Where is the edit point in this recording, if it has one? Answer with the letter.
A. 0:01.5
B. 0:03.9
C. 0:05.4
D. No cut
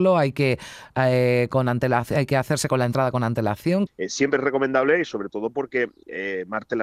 B